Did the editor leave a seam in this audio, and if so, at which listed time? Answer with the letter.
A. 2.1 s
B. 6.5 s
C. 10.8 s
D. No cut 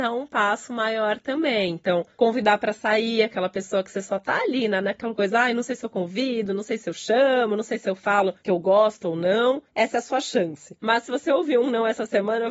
C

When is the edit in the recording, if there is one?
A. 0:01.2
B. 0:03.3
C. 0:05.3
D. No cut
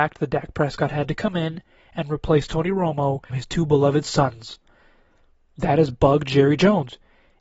B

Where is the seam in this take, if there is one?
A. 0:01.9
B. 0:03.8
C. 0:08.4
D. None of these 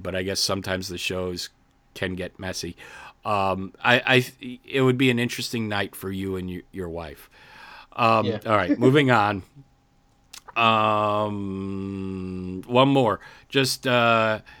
D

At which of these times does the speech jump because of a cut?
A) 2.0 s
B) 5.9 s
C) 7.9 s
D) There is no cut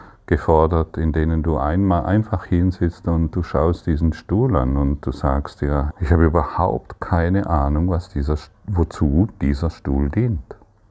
B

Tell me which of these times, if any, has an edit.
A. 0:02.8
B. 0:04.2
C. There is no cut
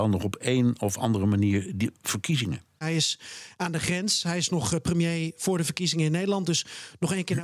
A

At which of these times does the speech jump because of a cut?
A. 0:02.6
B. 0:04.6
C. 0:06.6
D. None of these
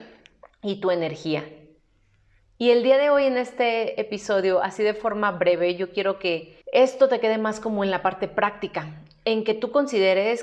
C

